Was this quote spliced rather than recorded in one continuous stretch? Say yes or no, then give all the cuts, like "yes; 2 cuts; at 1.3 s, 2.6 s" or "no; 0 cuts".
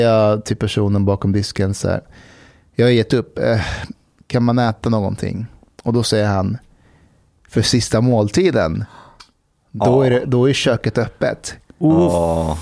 no; 0 cuts